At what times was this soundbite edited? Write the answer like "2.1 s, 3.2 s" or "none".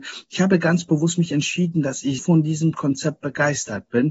2.2 s